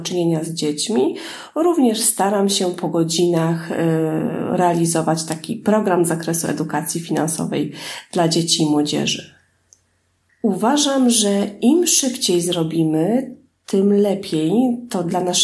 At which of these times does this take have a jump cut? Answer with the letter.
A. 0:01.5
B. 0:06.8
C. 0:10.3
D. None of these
C